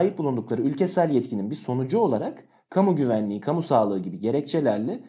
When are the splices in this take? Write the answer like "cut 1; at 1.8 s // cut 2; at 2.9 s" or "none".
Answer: cut 1; at 3.4 s

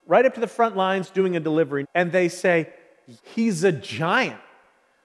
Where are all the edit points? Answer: cut 1; at 1.8 s // cut 2; at 3.2 s

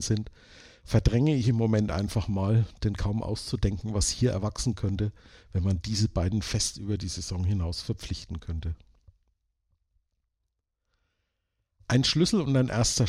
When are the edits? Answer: none

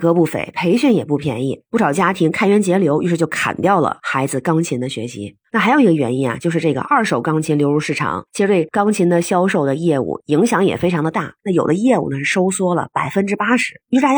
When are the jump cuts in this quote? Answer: cut 1; at 11.4 s

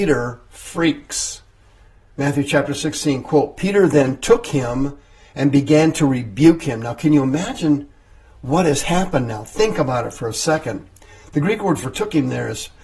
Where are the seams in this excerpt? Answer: none

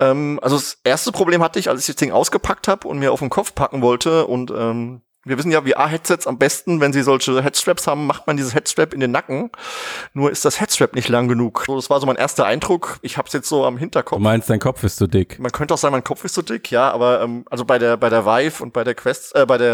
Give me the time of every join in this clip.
cut 1; at 11.7 s

